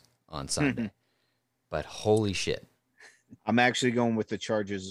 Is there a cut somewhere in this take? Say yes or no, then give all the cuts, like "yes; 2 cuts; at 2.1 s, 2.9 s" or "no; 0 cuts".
yes; 1 cut; at 3.4 s